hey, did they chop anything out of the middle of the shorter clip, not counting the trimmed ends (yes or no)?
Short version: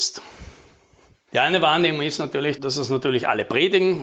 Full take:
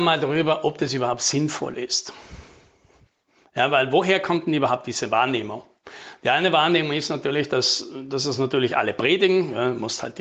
yes